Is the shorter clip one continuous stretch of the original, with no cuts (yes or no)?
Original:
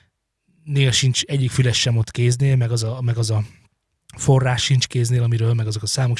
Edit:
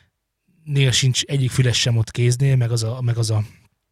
yes